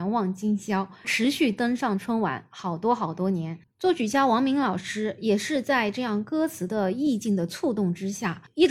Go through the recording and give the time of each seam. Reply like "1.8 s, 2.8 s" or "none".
3.6 s